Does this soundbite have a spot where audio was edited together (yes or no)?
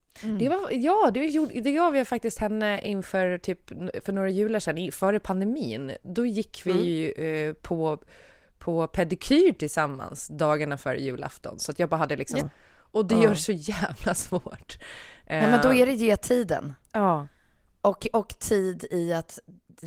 yes